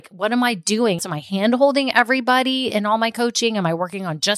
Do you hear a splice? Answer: yes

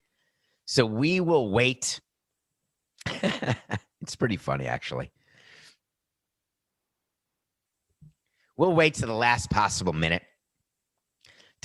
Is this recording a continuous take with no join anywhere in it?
yes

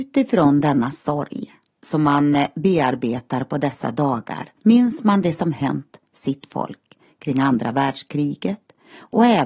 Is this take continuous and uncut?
no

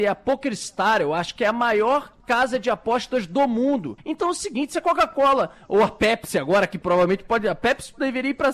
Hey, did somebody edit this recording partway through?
yes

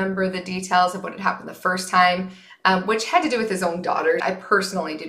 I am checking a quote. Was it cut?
yes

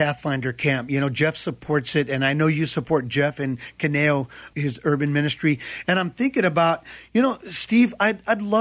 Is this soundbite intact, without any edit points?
no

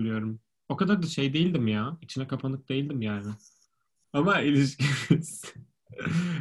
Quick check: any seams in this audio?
yes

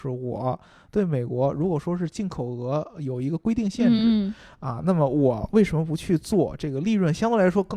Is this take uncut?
yes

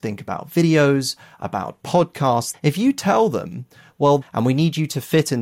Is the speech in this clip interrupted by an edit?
yes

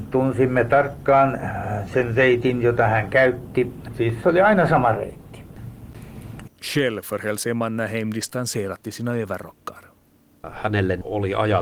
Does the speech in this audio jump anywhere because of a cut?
yes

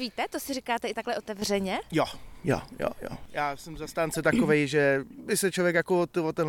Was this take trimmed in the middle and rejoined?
no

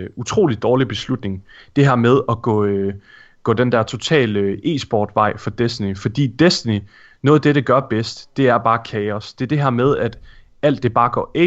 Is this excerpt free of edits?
yes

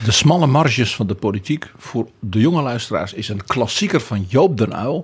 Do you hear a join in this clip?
no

